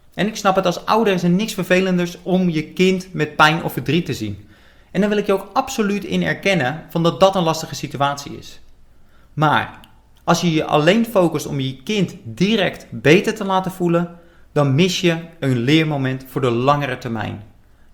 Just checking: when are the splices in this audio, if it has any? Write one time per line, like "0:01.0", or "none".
none